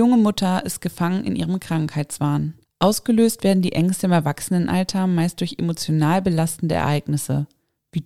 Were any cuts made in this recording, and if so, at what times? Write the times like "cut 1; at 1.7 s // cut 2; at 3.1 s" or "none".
cut 1; at 2.6 s